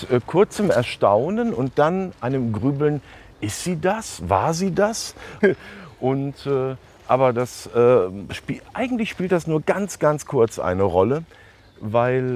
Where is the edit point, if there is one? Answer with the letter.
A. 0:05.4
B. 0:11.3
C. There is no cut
A